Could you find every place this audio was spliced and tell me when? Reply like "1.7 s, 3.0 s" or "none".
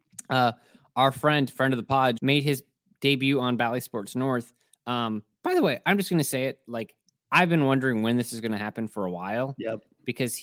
2.2 s